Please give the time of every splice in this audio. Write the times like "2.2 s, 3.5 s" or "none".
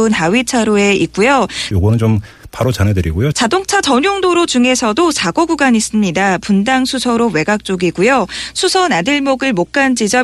1.7 s, 3.3 s